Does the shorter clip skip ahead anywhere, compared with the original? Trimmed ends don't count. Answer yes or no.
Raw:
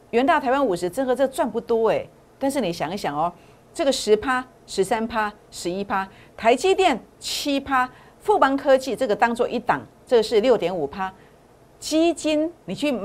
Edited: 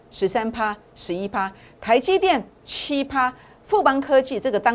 no